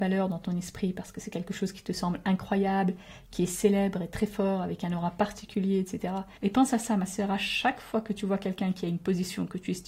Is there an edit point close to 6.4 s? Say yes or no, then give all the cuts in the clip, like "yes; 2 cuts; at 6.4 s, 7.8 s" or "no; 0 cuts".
yes; 1 cut; at 6.4 s